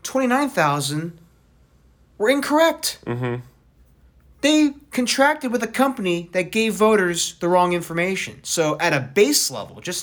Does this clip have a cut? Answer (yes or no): no